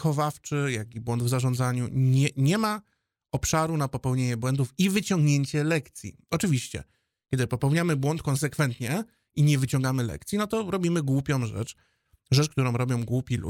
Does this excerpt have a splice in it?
no; 0 cuts

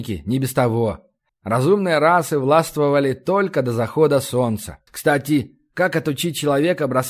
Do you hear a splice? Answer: yes; 2 cuts; at 1.3 s, 4.9 s

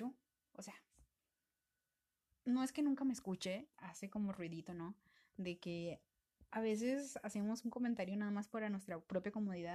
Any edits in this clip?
yes; 1 cut; at 3.7 s

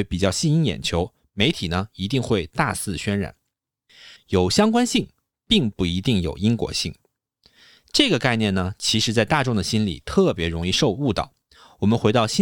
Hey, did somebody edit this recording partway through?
yes; 1 cut; at 4.2 s

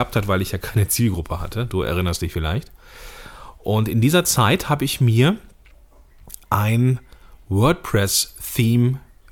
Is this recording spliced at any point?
no; 0 cuts

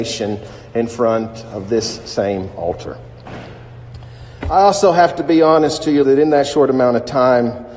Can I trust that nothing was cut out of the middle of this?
no; 2 cuts; at 4.4 s, 6.0 s

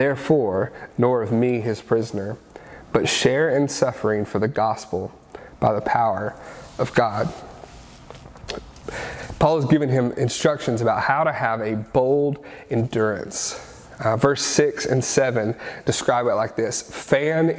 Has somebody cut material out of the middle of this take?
yes; 1 cut; at 0.9 s

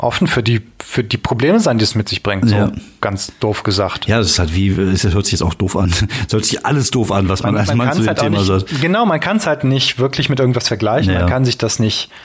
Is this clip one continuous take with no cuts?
yes; 0 cuts

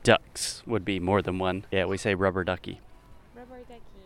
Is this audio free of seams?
no; 1 cut; at 1.7 s

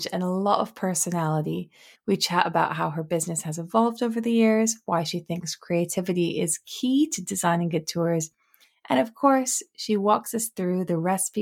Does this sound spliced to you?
no; 0 cuts

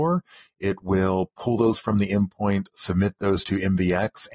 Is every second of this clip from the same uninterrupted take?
yes; 0 cuts

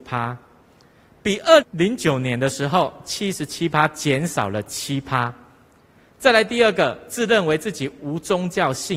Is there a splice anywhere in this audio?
yes; 1 cut; at 1.6 s

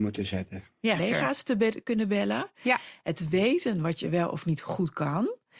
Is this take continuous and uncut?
no; 1 cut; at 1.0 s

